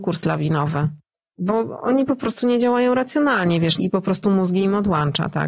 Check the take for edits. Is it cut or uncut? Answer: cut